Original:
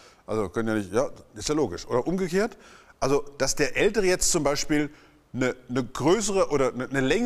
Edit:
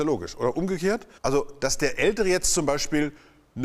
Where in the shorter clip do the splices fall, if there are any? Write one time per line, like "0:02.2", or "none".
0:01.2